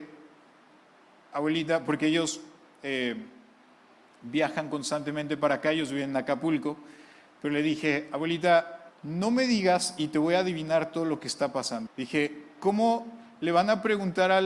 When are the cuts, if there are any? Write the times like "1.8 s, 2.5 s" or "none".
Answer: 8.9 s, 11.9 s